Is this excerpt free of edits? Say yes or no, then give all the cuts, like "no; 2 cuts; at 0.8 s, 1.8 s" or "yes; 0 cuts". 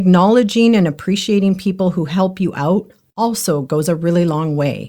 yes; 0 cuts